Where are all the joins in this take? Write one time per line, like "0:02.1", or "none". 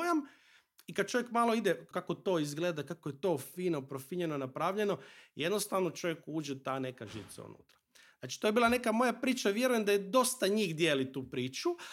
0:01.9